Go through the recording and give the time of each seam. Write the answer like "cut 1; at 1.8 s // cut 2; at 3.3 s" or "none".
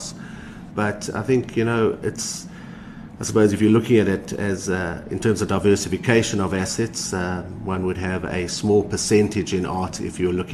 none